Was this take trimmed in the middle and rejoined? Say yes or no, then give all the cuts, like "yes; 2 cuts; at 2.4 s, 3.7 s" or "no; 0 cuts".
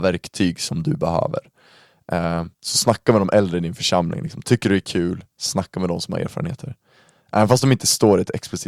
yes; 1 cut; at 2.5 s